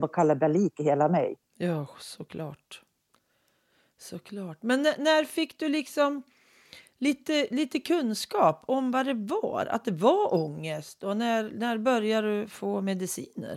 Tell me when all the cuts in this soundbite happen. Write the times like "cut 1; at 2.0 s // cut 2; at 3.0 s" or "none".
none